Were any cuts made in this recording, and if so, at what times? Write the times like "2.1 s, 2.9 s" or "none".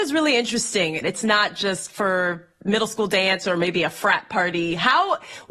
1.0 s